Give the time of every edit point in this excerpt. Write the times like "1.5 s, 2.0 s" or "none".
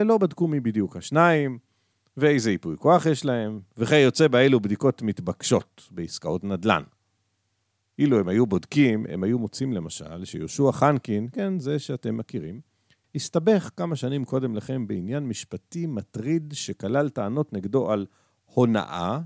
11.3 s

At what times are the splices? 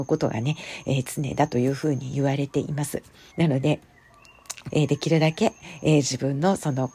3.3 s, 4.7 s

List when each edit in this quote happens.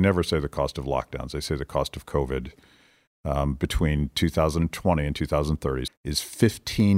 5.9 s

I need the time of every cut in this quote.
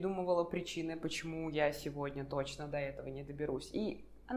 none

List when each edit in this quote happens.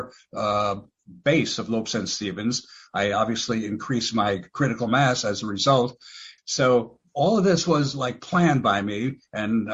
6.4 s

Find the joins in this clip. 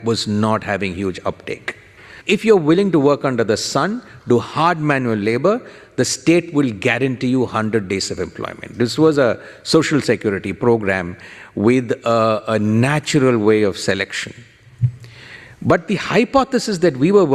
2.2 s

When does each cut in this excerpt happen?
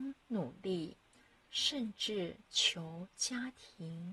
1.4 s

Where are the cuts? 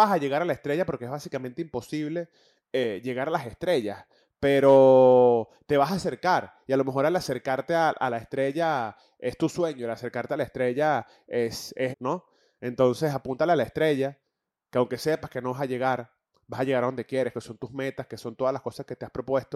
11.9 s, 17.3 s

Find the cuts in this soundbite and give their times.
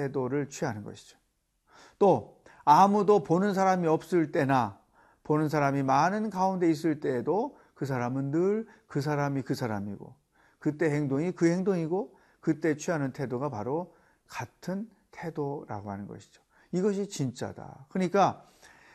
none

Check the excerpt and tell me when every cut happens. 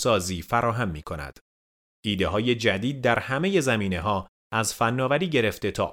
1.9 s

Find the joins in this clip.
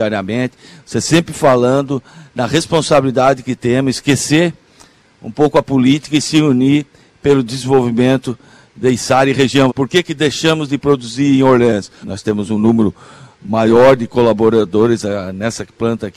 9.7 s, 12.0 s

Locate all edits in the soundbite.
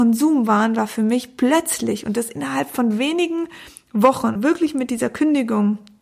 4.4 s

